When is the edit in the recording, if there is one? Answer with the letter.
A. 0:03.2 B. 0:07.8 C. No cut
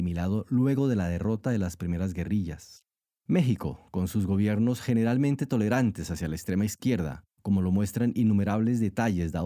A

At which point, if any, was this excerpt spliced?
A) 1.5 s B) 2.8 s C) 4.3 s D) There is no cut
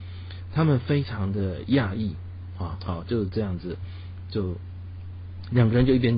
B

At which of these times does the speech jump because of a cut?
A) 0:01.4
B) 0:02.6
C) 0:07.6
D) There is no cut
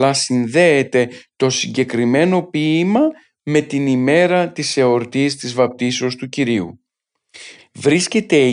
C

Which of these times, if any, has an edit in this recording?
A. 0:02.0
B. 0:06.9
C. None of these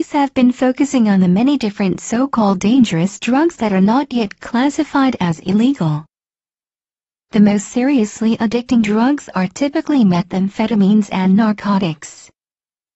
C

